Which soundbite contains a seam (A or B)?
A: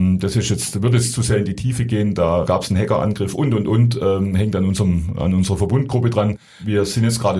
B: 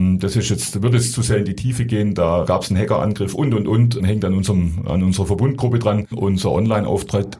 B